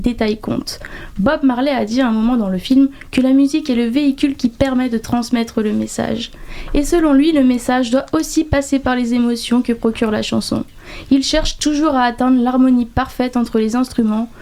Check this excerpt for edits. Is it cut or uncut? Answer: uncut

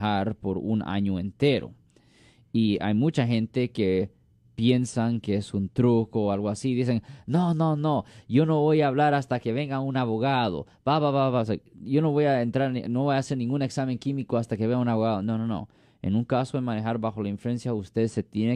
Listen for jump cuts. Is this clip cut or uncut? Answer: uncut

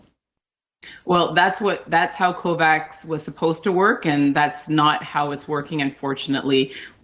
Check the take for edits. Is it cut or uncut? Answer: uncut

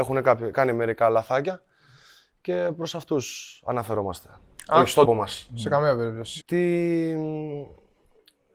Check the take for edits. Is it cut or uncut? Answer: cut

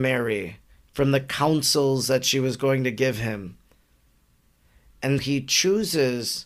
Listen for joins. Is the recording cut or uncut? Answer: cut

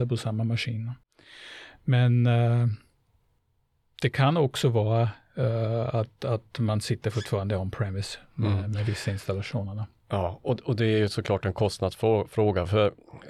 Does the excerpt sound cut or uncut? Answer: uncut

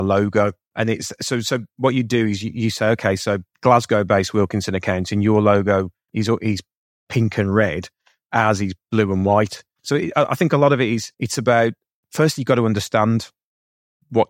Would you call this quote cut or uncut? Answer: cut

